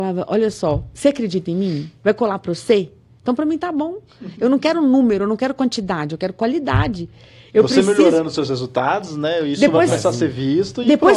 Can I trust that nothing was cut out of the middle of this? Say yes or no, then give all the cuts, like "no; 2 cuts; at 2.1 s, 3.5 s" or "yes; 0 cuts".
yes; 0 cuts